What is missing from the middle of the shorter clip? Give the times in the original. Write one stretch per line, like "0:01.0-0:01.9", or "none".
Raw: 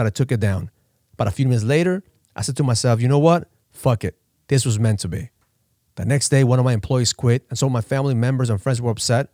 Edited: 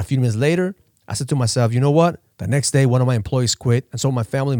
0:03.6-0:05.9

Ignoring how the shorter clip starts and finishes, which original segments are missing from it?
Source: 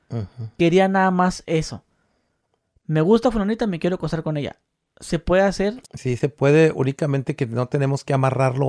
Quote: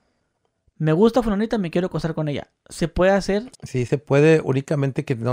0:04.7-0:04.9

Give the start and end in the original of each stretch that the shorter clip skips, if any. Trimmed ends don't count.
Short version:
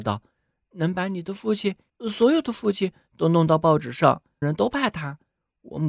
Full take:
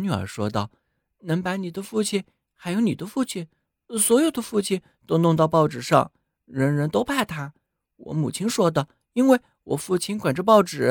0:02.4-0:03.8
0:06.3-0:06.8

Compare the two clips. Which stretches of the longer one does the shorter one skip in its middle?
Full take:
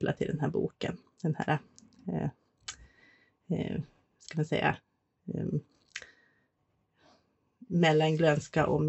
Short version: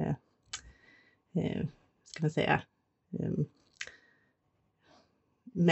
none

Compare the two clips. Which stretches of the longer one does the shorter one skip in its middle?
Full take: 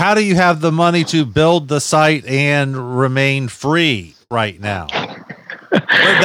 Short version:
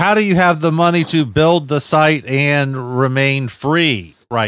none

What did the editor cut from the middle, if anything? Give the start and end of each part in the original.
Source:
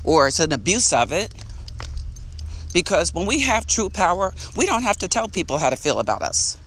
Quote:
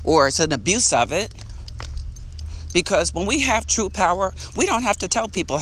none

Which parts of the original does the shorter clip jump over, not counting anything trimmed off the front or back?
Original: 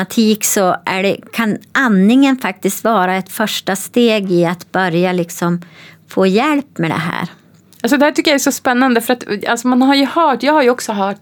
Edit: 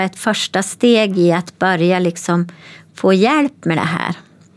none

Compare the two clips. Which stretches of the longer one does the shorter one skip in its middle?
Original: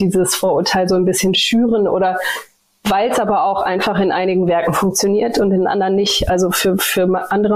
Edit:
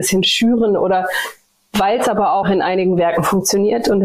0:03.5-0:03.9

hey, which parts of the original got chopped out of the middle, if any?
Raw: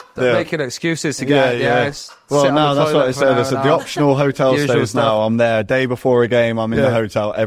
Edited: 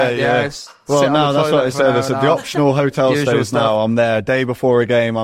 none

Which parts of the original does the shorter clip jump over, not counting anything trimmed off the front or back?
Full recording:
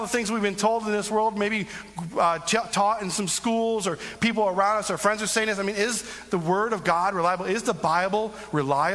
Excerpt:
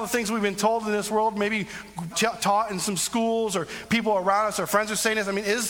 0:02.1-0:02.4

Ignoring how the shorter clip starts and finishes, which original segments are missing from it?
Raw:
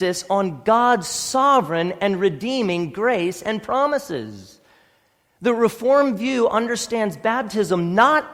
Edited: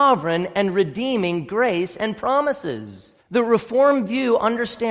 0:04.7-0:05.3

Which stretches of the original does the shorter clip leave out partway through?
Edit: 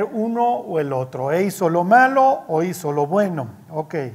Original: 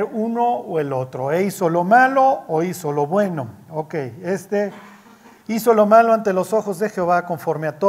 none

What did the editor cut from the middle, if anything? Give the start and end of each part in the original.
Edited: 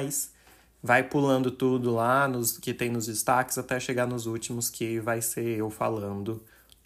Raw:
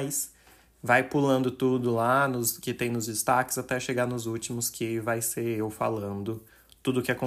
none

